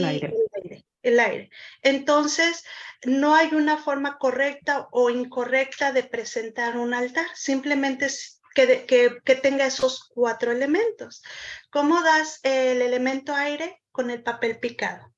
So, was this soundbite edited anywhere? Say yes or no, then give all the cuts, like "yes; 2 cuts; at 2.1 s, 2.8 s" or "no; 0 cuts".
no; 0 cuts